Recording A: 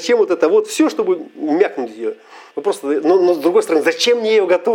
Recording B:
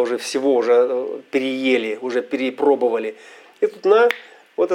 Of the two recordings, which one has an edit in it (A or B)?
A